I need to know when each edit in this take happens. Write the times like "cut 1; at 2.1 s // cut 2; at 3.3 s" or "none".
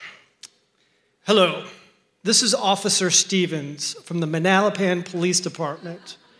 none